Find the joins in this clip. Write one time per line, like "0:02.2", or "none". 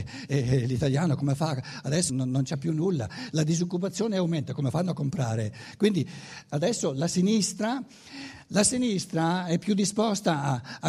0:02.1